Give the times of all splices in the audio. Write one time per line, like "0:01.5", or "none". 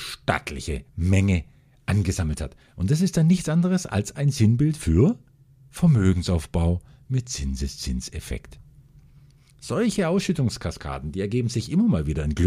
none